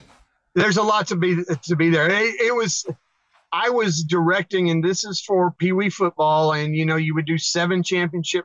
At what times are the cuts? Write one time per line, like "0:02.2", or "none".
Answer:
none